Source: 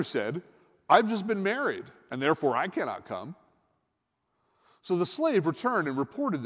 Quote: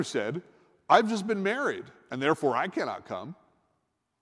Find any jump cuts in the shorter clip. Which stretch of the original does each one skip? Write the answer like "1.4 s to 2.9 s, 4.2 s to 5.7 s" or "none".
none